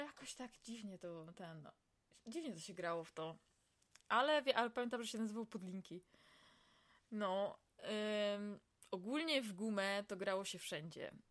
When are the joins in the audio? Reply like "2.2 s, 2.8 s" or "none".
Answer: none